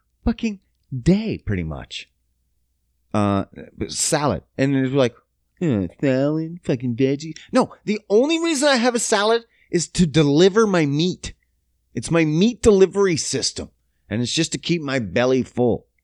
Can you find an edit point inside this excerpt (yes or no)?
no